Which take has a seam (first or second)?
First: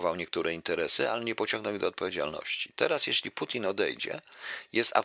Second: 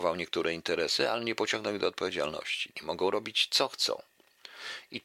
second